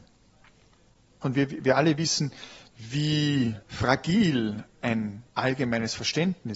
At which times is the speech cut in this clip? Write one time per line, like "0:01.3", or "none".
0:01.2
0:03.6
0:05.3